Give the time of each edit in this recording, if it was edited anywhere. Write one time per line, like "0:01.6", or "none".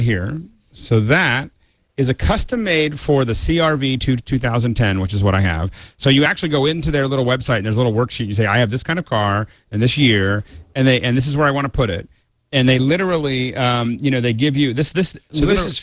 none